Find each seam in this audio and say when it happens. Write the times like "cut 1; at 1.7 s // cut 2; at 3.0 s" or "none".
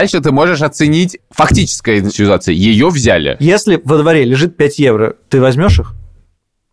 none